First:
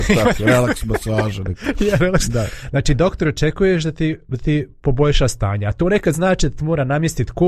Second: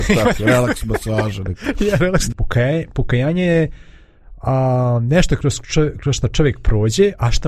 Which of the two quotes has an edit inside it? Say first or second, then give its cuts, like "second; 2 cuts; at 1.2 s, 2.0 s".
second; 1 cut; at 2.3 s